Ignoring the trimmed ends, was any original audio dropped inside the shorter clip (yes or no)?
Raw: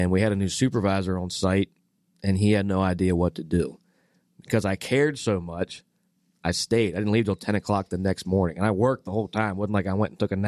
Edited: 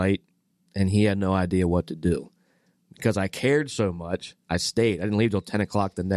yes